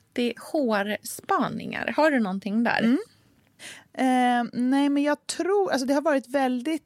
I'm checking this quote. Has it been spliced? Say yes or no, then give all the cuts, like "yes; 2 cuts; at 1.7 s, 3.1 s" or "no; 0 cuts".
no; 0 cuts